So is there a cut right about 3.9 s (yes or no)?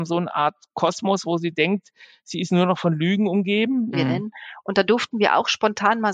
yes